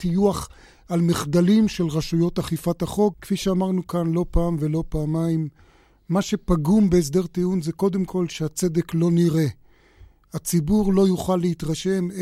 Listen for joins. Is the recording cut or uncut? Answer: cut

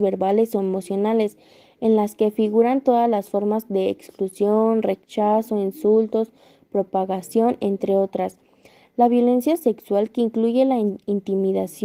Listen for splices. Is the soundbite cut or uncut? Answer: uncut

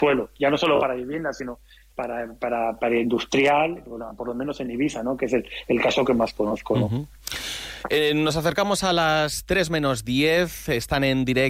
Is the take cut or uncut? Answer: uncut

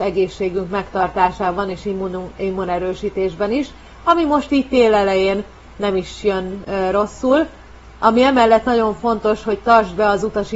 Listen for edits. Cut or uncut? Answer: uncut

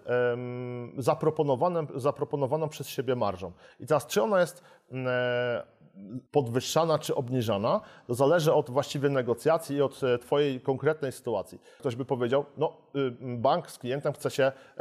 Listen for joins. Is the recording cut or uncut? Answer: cut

